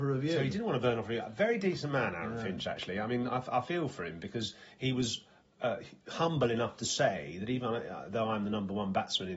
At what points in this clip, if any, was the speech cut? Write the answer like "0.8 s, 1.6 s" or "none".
none